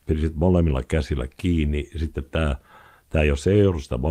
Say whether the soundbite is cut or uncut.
uncut